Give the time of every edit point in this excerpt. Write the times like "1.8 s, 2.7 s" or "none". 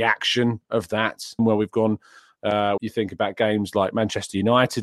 1.4 s, 2.8 s